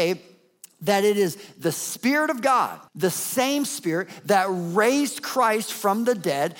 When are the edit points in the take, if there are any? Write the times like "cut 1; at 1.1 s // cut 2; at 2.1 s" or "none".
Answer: cut 1; at 2.9 s